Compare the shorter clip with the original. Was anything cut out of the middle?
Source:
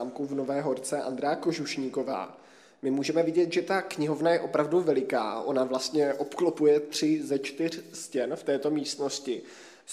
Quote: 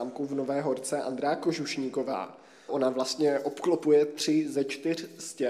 yes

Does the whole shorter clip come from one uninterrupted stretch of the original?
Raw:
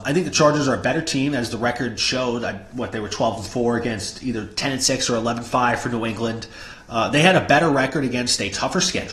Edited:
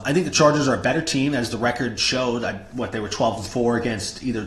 yes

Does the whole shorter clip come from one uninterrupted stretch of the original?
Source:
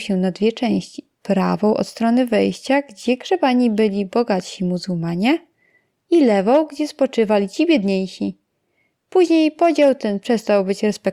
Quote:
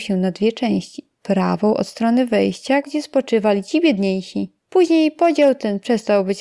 no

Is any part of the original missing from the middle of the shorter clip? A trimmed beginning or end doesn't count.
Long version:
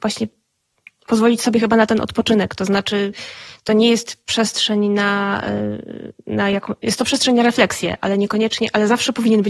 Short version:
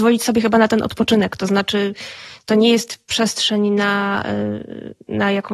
no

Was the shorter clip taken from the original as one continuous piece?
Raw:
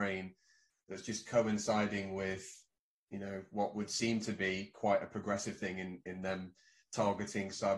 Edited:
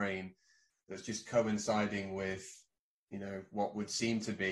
yes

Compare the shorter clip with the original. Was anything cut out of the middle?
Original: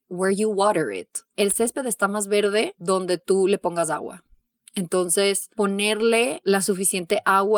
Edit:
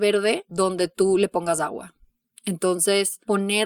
no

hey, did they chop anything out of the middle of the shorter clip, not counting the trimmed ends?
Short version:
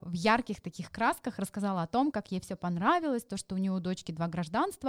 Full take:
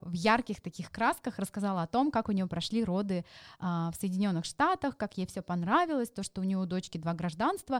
yes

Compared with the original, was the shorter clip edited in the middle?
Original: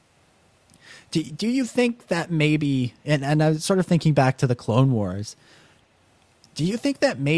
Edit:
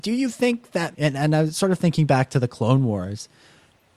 yes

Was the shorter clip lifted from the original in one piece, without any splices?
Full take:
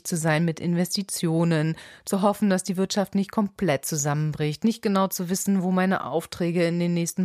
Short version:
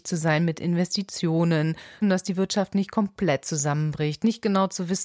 no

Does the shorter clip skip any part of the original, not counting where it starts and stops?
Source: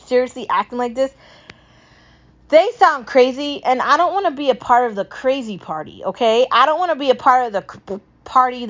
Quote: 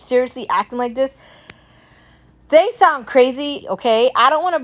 yes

